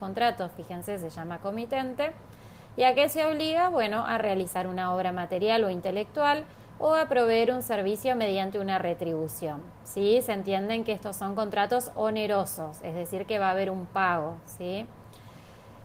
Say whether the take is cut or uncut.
uncut